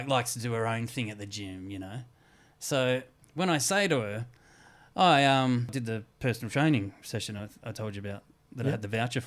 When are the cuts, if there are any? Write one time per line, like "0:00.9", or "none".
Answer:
none